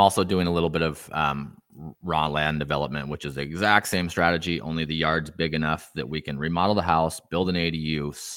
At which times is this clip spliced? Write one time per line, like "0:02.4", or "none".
none